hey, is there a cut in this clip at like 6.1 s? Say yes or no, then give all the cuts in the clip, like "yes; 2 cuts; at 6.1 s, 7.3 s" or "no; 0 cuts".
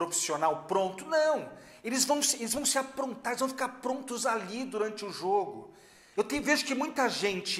yes; 1 cut; at 6.1 s